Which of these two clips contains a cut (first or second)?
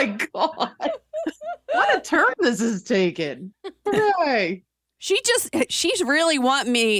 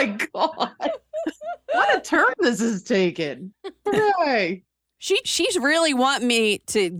second